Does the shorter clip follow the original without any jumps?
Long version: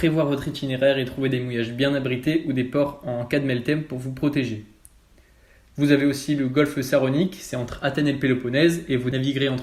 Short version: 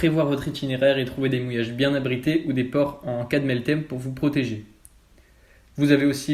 yes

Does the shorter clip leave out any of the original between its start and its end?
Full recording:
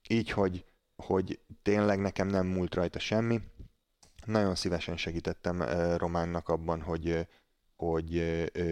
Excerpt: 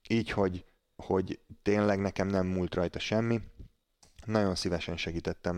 no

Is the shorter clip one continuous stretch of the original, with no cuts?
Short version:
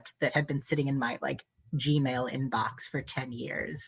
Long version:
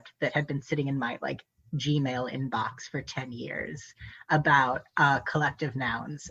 yes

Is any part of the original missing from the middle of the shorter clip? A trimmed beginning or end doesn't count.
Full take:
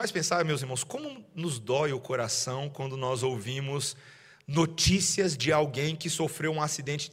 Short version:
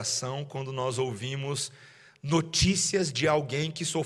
no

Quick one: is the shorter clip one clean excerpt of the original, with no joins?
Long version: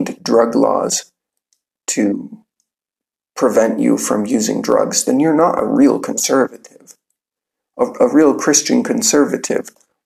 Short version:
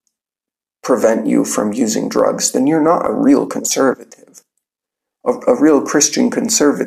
yes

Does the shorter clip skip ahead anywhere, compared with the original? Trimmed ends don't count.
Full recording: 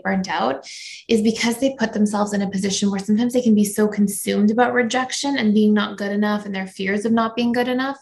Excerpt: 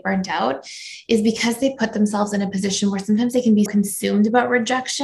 yes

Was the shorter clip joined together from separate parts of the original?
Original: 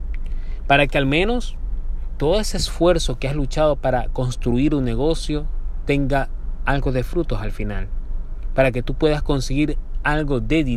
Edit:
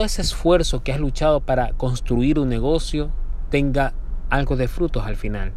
no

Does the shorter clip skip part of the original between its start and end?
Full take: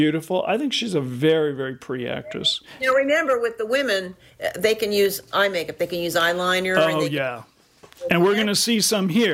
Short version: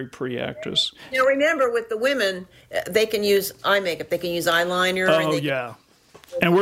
no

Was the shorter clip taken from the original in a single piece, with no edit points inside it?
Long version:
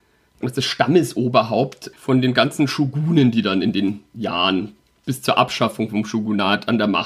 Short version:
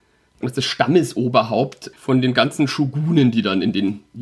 yes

